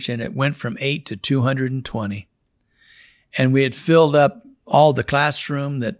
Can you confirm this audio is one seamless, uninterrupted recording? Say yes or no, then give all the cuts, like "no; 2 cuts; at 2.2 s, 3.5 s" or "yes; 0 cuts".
yes; 0 cuts